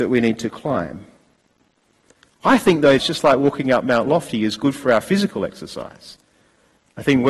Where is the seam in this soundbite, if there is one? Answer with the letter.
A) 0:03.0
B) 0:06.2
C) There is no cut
A